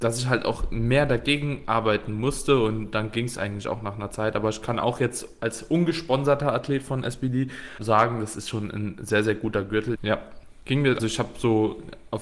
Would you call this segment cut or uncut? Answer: cut